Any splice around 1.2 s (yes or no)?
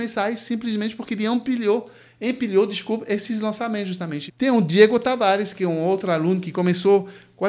no